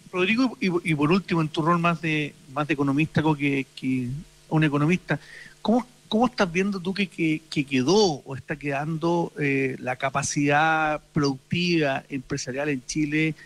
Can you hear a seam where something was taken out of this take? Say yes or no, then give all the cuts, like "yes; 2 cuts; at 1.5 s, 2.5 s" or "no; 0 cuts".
yes; 1 cut; at 4.5 s